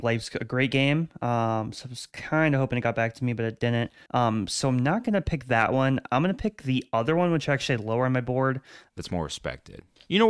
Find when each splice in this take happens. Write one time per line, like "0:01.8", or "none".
0:04.1
0:08.9